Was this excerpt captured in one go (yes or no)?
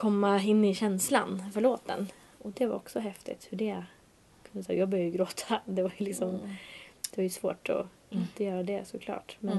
yes